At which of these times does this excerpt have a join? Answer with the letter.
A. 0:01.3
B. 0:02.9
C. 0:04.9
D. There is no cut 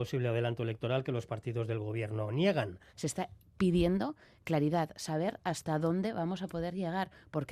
B